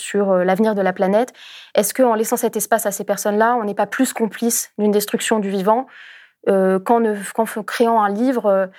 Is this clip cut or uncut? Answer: uncut